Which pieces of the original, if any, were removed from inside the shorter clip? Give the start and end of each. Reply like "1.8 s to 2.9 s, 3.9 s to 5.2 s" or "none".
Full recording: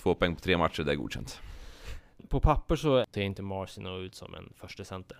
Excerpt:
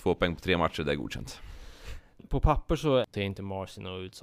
none

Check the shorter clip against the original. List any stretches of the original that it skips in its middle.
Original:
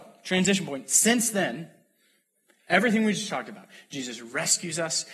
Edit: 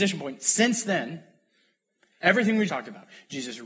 3.2 s to 3.3 s

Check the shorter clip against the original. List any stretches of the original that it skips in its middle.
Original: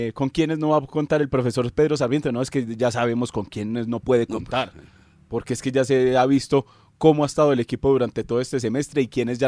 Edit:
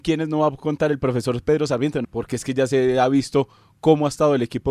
2.3 s to 5.2 s

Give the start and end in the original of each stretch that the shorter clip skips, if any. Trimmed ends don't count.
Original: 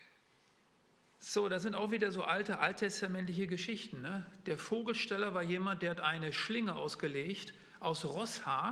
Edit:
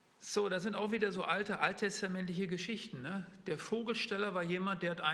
none

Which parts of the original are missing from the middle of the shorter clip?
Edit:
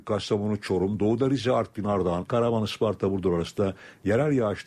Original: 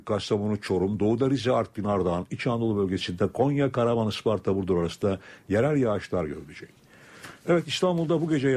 2.3 s to 3.7 s

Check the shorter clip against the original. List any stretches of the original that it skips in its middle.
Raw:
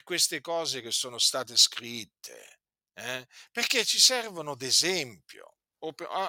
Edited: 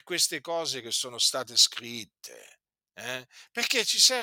none

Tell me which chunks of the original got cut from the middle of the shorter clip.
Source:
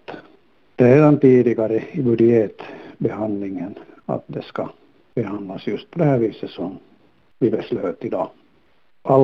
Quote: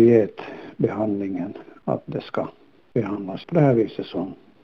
5.6 s to 5.9 s

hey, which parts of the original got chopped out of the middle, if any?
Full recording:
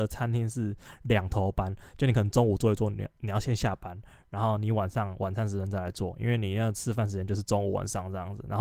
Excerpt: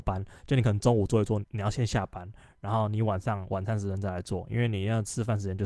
2.9 s to 3.1 s

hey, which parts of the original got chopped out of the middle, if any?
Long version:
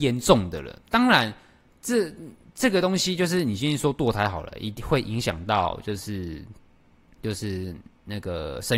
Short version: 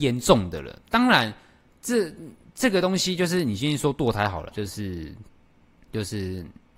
4.5 s to 5.8 s

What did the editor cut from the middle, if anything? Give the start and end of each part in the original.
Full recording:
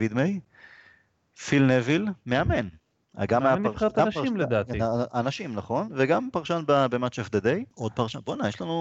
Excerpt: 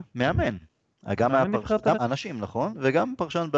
4.1 s to 5.1 s

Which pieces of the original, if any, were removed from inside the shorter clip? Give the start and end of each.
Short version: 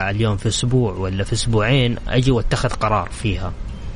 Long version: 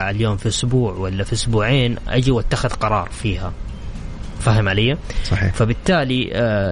none

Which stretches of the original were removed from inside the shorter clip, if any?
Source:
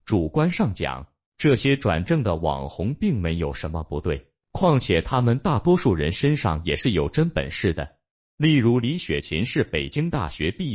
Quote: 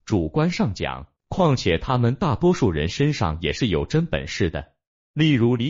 1.2 s to 4.4 s

